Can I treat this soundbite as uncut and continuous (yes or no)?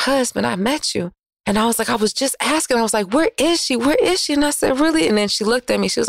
yes